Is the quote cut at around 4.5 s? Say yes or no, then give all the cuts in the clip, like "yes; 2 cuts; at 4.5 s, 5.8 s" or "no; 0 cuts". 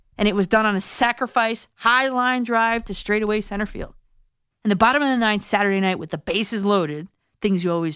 yes; 1 cut; at 4.5 s